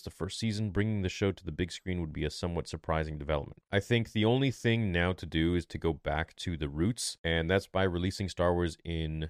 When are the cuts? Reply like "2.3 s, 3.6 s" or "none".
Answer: 3.6 s

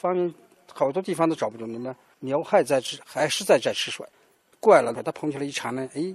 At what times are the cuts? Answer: 2.1 s, 4.9 s

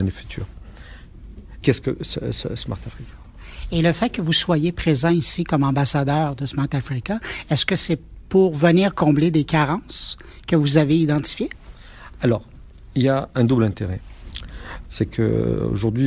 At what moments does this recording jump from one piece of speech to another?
1.6 s, 14.8 s

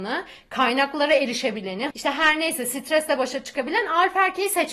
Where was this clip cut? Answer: 1.9 s

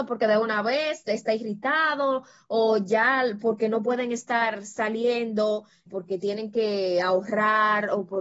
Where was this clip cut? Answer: 5.9 s

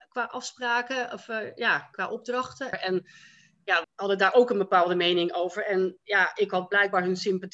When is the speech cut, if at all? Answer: 2.7 s, 3.8 s

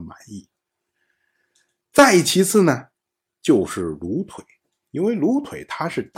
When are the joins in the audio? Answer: none

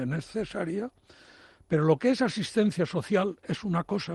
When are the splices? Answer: none

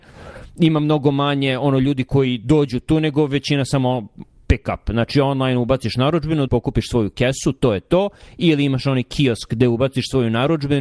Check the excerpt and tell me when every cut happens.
6.5 s

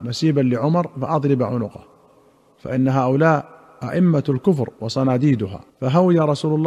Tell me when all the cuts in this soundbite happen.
5.7 s

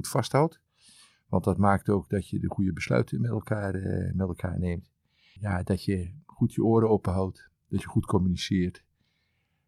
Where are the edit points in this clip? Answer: none

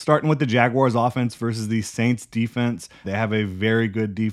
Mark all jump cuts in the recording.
3.0 s

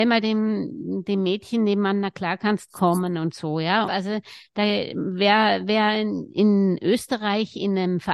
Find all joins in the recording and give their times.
3.8 s

